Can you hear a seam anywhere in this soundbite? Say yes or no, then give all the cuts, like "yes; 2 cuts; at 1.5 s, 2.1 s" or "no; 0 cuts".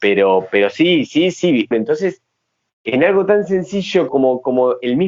yes; 2 cuts; at 1.7 s, 4.1 s